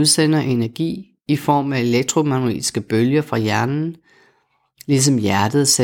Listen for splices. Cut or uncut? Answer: uncut